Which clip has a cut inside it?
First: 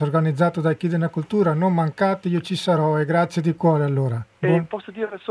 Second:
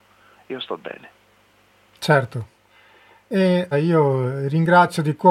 second; 1 cut; at 3.7 s

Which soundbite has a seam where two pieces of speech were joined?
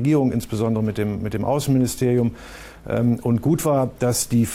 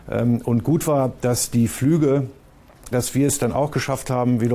second; 1 cut; at 2.9 s

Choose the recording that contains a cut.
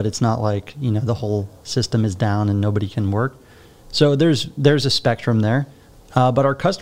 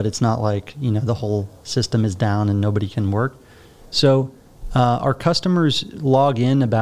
second; 1 cut; at 3.8 s

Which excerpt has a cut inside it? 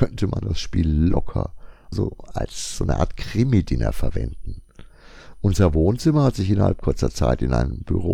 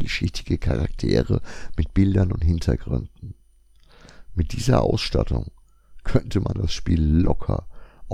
first; 1 cut; at 1.9 s

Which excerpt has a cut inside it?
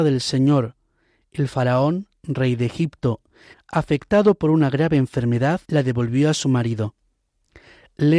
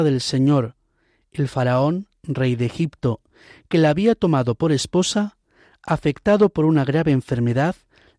first; 2 cuts; at 3.5 s, 5.6 s

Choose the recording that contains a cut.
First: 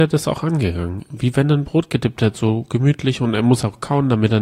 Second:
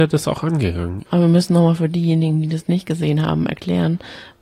second; 1 cut; at 1.1 s

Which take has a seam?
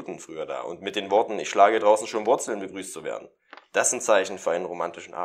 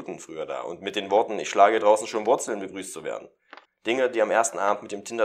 second; 1 cut; at 3.7 s

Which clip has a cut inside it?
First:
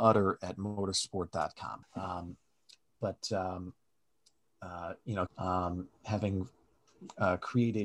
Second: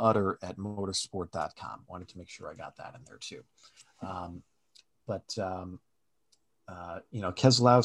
first; 2 cuts; at 1.8 s, 5.3 s

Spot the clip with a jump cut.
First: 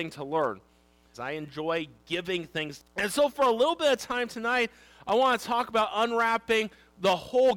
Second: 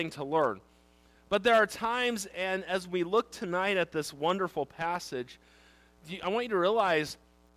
first; 2 cuts; at 1.1 s, 2.8 s

